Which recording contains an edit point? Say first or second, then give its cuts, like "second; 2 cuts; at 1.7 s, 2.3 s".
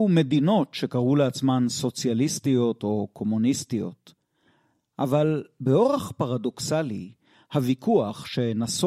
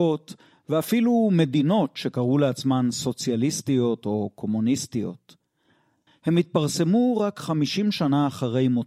second; 1 cut; at 6.1 s